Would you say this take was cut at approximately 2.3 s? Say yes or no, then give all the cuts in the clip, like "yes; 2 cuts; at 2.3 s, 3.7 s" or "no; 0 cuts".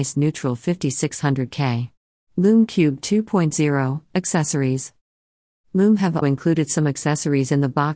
yes; 2 cuts; at 2.3 s, 6.2 s